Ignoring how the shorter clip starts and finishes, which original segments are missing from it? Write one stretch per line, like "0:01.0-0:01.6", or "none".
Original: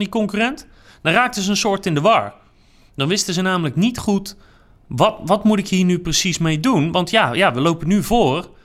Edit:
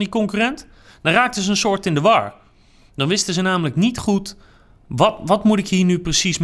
none